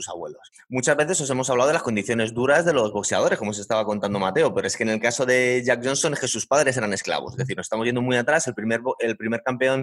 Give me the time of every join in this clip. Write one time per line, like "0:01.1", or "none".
none